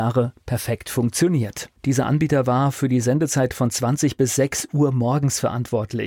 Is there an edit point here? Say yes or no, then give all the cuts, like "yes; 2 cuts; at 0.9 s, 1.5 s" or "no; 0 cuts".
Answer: yes; 1 cut; at 1.8 s